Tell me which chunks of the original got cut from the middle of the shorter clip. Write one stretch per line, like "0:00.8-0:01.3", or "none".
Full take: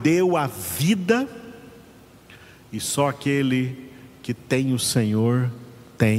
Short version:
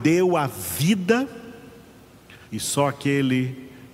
0:02.4-0:02.6

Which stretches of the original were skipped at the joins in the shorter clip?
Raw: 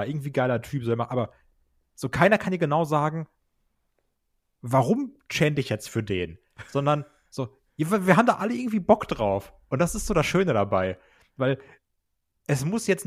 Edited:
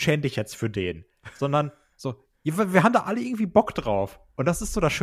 none

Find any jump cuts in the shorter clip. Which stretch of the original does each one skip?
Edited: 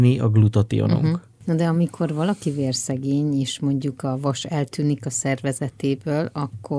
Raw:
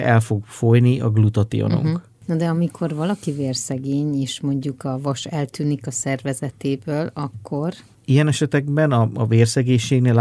none

